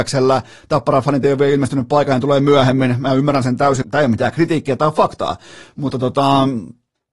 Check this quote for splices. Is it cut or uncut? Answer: cut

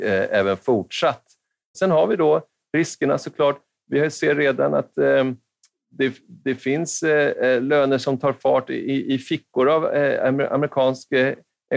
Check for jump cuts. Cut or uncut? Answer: cut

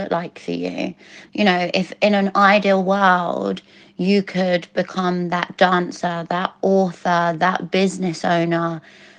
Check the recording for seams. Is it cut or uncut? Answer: cut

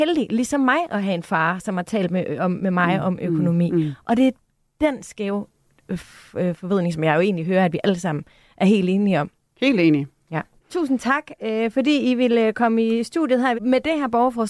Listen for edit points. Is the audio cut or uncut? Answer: cut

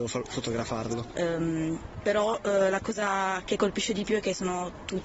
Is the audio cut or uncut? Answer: cut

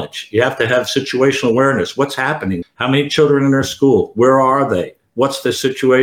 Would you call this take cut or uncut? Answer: cut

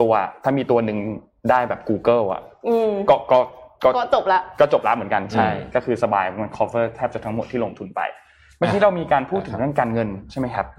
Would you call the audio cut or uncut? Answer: uncut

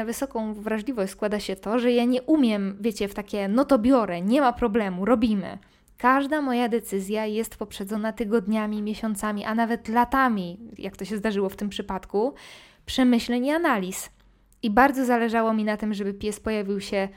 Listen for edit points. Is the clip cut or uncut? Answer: cut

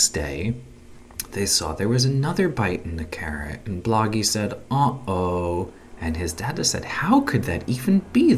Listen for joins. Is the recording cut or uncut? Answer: cut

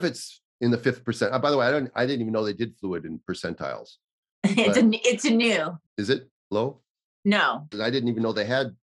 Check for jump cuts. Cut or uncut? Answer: cut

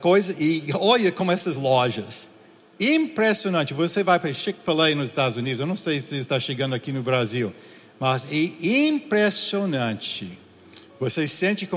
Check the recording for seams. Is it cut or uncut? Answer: uncut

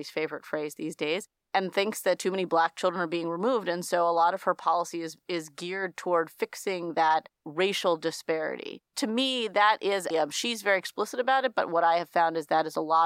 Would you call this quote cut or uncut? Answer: cut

